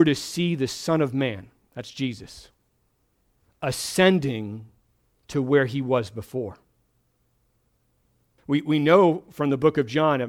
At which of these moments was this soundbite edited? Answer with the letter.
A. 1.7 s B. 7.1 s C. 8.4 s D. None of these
C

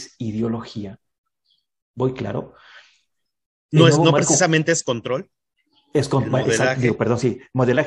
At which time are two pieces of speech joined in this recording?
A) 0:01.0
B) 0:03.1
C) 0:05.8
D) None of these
D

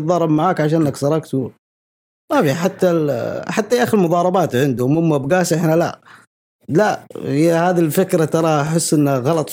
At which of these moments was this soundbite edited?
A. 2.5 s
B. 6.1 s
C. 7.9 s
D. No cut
D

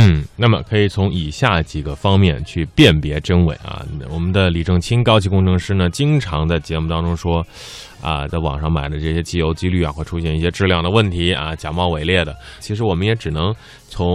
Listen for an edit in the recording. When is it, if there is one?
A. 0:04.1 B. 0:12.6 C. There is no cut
B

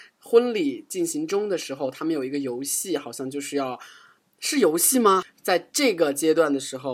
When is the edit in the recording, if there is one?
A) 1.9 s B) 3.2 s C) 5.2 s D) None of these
C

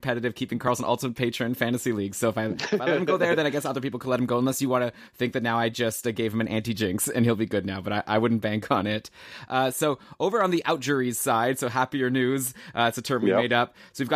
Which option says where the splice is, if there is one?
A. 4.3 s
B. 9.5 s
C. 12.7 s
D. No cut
D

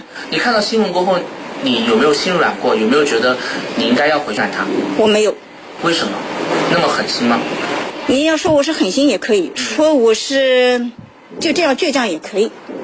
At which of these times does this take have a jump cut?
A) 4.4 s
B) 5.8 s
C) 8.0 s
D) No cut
A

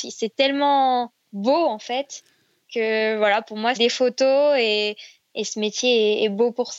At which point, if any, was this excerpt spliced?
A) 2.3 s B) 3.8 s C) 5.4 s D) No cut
B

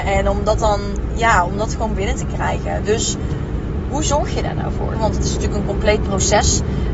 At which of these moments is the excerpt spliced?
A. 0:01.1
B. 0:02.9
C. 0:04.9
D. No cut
C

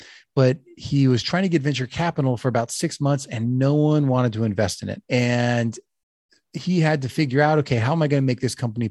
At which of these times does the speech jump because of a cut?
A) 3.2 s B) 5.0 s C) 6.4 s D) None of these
B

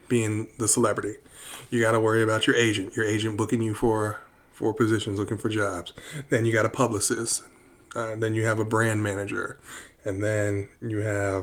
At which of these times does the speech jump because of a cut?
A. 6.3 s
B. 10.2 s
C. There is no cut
C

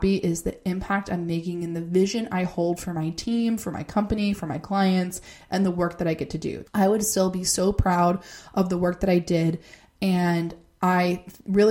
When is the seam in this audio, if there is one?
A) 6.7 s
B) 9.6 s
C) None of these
A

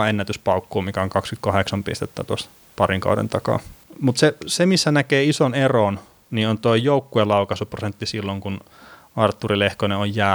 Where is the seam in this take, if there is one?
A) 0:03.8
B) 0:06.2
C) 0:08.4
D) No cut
A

